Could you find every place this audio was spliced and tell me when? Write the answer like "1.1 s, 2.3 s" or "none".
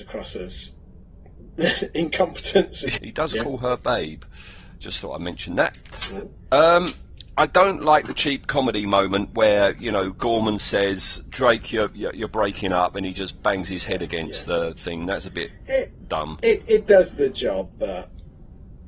3.0 s